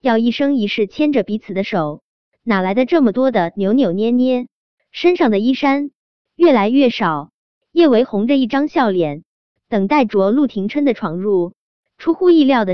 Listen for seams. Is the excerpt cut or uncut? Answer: uncut